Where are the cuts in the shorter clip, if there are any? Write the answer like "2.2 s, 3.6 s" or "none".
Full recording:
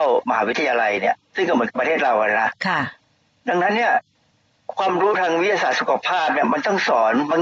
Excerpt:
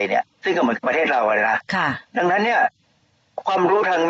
2.1 s